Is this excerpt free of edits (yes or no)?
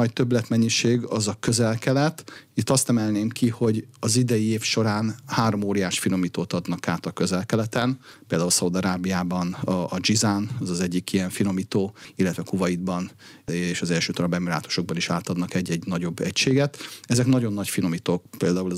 yes